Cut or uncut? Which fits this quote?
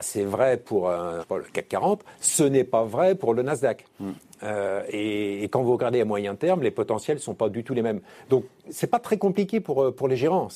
cut